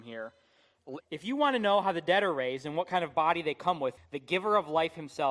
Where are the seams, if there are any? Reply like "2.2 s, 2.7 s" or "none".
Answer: 1.0 s, 4.0 s